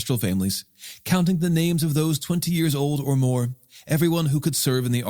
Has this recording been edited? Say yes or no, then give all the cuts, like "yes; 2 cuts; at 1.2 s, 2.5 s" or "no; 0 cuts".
no; 0 cuts